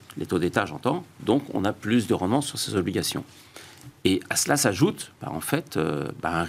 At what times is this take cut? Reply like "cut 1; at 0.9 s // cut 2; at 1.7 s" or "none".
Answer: none